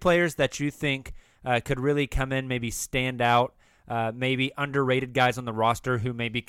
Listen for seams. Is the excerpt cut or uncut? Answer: uncut